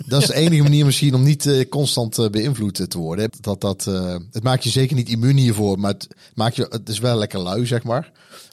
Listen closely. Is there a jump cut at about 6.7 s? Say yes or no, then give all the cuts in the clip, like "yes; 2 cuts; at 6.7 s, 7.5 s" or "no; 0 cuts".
no; 1 cut; at 3.3 s